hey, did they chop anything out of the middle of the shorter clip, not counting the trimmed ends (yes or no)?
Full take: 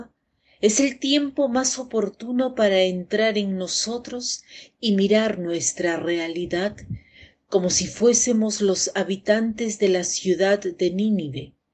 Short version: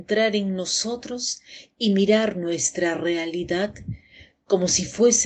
no